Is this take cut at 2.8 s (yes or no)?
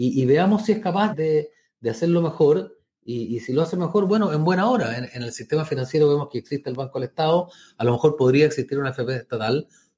no